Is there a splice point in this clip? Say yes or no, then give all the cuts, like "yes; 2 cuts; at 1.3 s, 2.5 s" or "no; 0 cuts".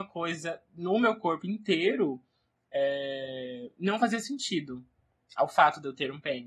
no; 0 cuts